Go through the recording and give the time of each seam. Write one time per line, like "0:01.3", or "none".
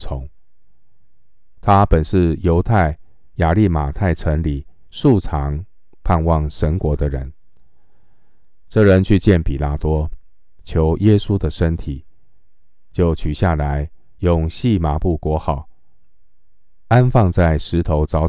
none

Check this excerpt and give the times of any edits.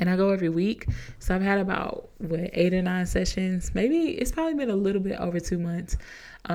none

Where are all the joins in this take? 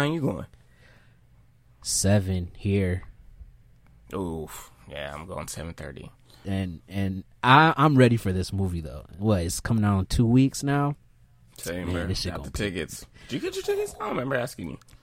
0:06.4

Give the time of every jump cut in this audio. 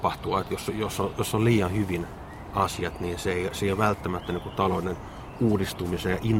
none

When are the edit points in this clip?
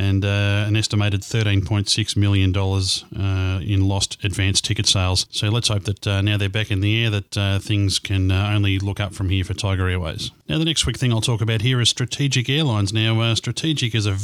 none

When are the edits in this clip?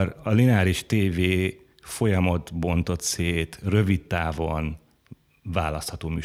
none

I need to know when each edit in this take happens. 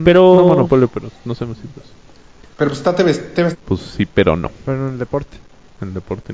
0:03.5

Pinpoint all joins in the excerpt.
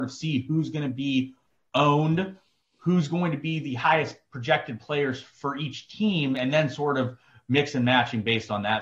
none

